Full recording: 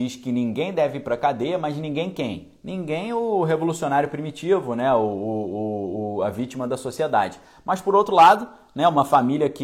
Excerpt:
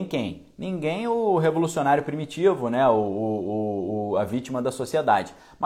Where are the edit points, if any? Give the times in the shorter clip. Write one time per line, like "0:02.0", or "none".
none